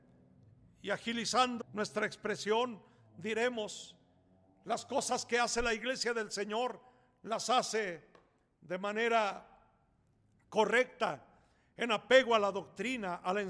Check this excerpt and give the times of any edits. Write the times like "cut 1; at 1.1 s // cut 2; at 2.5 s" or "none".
cut 1; at 1.6 s

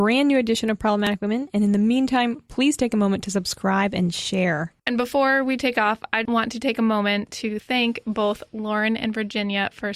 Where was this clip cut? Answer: cut 1; at 4.8 s // cut 2; at 6.3 s

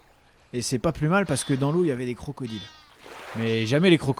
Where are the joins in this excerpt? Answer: none

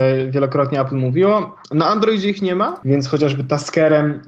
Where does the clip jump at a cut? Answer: cut 1; at 1.6 s // cut 2; at 2.8 s

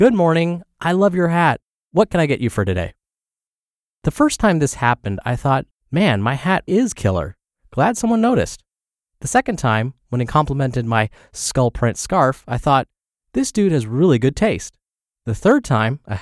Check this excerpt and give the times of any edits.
cut 1; at 6.7 s

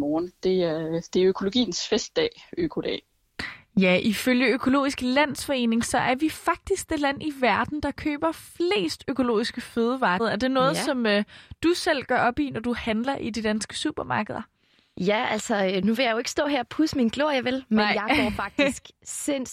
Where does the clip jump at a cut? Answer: cut 1; at 10.2 s

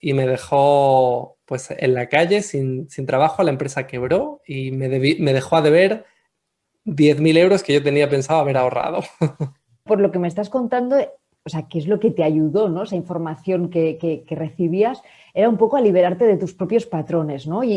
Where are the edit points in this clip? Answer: cut 1; at 9.9 s

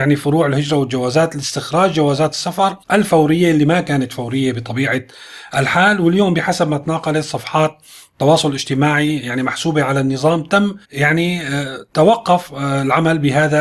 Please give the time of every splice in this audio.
cut 1; at 2.8 s // cut 2; at 10.8 s

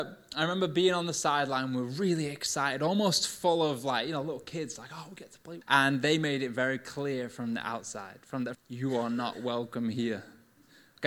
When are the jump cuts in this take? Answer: cut 1; at 5.6 s // cut 2; at 8.5 s

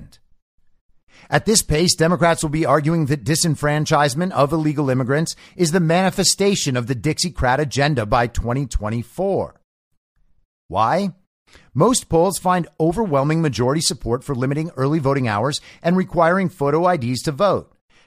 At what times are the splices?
cut 1; at 10.5 s

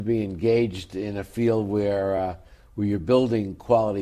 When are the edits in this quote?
none

